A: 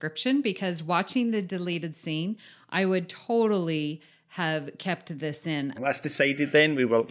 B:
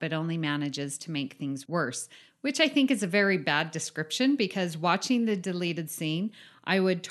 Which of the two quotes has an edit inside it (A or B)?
A